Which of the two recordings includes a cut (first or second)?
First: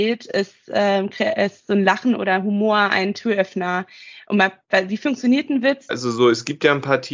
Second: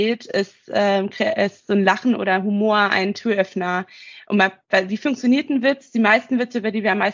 first